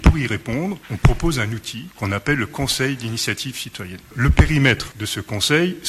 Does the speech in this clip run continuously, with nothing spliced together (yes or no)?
yes